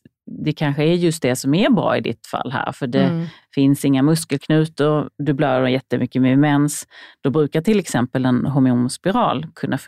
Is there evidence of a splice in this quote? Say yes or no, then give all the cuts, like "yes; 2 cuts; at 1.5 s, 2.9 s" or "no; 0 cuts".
no; 0 cuts